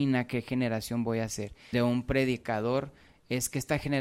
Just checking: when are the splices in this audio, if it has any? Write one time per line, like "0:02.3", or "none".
0:01.7